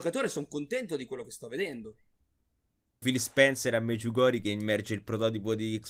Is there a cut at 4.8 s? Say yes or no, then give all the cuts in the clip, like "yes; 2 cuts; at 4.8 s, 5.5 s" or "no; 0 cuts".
no; 1 cut; at 3.0 s